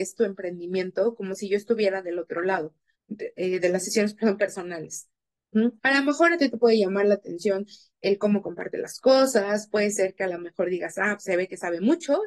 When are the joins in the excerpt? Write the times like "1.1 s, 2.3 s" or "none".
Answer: 2.9 s, 5.8 s, 11.2 s